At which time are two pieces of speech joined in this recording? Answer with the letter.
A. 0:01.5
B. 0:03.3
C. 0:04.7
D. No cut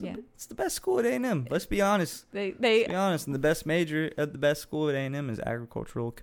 D